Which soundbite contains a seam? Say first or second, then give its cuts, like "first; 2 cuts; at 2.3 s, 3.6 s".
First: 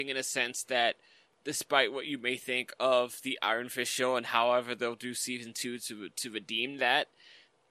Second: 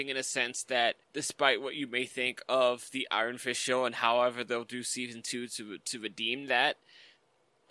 second; 1 cut; at 1.0 s